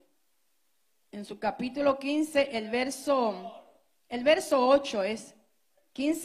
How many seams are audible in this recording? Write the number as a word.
zero